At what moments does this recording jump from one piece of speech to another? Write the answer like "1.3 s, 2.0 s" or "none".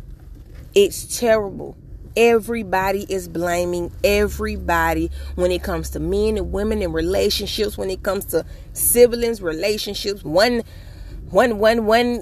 7.8 s, 10.2 s